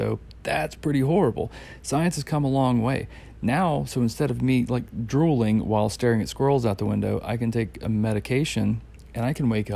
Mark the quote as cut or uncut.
uncut